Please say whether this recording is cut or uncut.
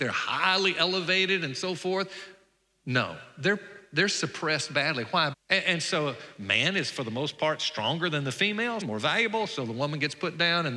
cut